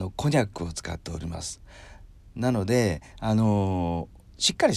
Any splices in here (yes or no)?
no